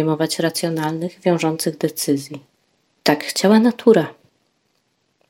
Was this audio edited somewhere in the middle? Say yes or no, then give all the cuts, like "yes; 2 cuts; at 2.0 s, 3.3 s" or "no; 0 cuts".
no; 0 cuts